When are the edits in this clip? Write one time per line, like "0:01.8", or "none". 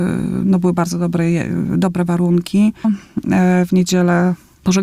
0:02.8

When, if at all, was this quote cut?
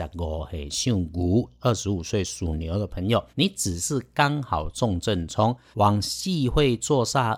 0:03.3
0:05.7

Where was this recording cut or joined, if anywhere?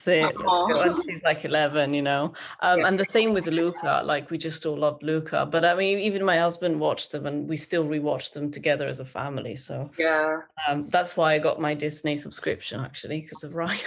none

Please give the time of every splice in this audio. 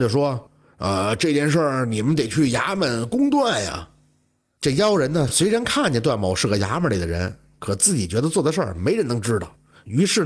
none

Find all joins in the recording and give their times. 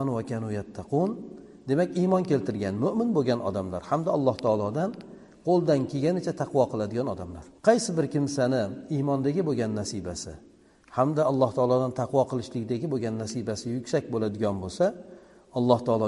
0:07.6

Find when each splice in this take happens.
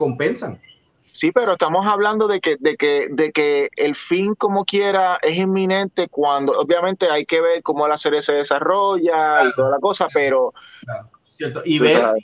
0:06.5
0:11.1

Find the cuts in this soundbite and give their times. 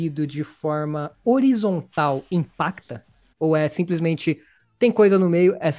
0:03.3

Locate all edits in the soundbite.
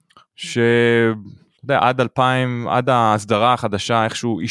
none

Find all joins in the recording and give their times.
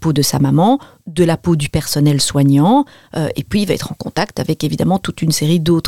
none

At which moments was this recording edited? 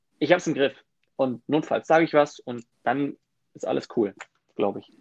0:01.1
0:02.7

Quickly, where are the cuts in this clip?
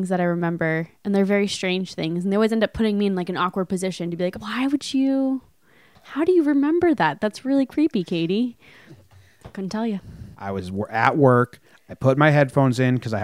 0:04.3
0:10.3

